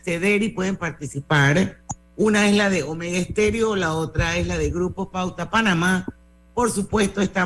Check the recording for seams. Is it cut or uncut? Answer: uncut